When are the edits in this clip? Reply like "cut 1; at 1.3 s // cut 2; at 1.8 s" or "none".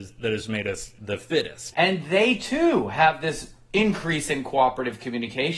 cut 1; at 1.7 s